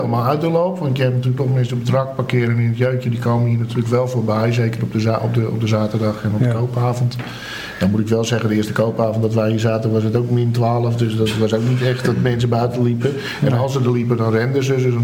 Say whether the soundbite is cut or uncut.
uncut